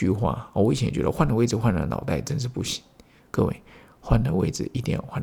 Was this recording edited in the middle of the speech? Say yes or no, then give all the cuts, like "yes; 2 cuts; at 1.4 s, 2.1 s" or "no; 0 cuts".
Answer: no; 0 cuts